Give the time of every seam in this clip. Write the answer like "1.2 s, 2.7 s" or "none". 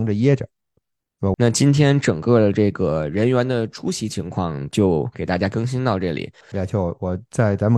1.3 s, 6.4 s